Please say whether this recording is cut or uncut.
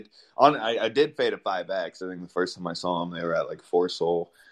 uncut